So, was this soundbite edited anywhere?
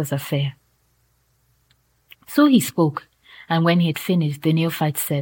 no; 0 cuts

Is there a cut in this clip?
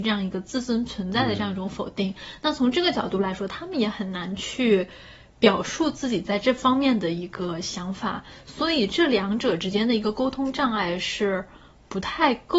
no; 0 cuts

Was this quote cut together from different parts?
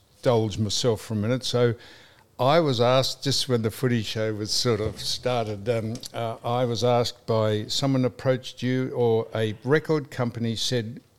no; 0 cuts

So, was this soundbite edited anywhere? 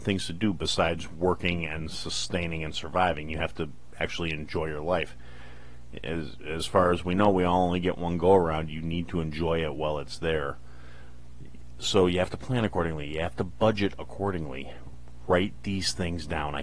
no; 0 cuts

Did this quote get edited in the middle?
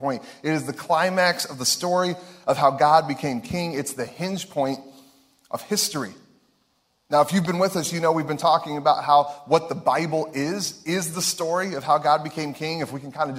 no; 0 cuts

